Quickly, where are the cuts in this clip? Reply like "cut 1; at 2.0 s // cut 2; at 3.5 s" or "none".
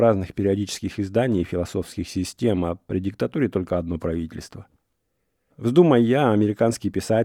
cut 1; at 5.5 s